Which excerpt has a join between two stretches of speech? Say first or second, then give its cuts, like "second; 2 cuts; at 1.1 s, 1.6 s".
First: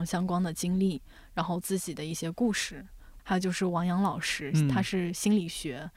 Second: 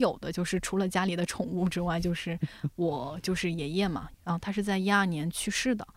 first; 1 cut; at 3.2 s